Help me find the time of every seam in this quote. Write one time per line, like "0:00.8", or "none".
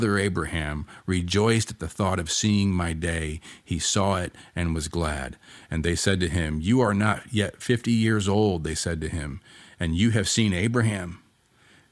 none